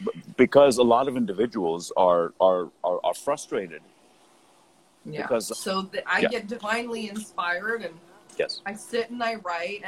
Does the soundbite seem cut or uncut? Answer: cut